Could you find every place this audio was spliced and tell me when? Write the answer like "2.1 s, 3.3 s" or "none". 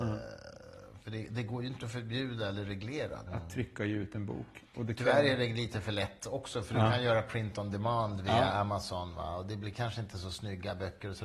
3.3 s